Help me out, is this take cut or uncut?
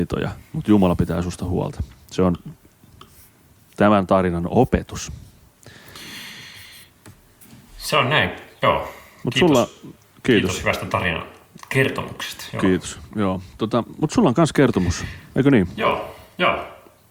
uncut